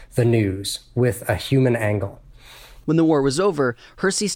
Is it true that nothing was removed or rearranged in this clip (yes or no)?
no